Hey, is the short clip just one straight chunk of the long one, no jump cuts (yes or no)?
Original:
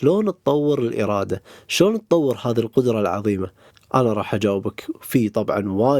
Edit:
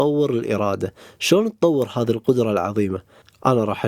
yes